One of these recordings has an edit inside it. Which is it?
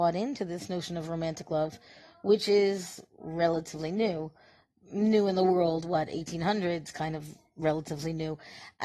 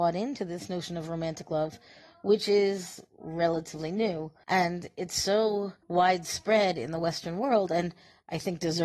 second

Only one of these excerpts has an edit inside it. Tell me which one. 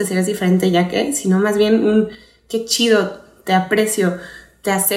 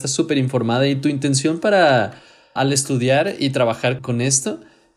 second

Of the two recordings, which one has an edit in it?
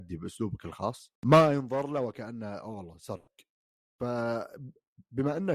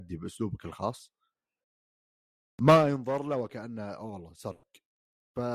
first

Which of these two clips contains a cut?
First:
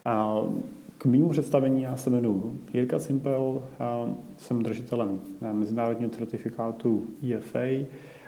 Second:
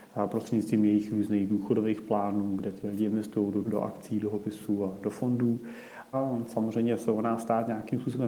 second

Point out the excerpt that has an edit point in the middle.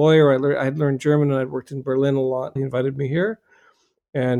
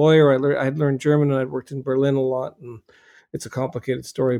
first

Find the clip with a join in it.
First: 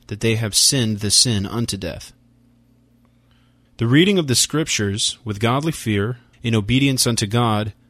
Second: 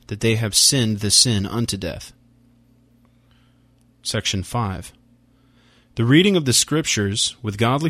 first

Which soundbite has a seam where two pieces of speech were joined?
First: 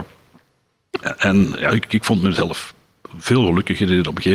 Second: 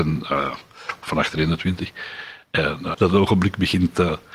second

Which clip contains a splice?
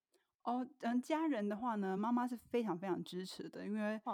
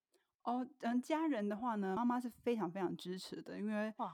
second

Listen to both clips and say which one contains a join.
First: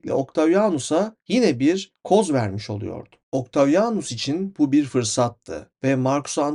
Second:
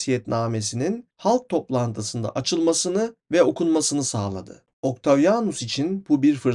second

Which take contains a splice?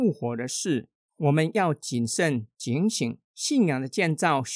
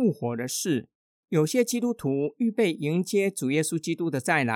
first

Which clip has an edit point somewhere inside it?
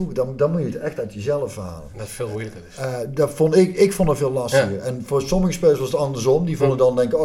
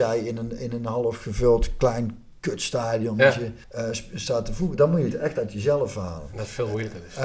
second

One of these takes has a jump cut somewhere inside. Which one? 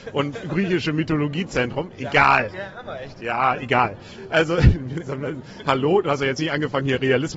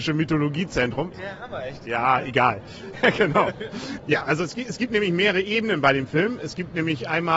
second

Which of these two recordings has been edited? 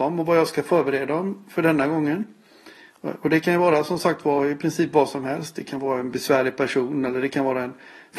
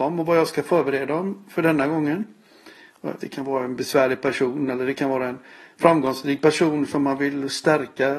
second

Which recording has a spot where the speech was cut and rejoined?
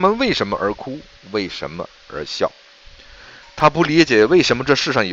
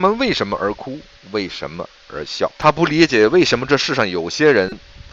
second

